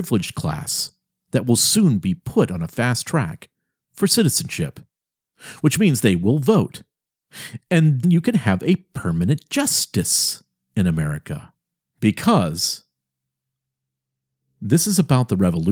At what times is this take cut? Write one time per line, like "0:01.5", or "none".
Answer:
0:08.0
0:11.8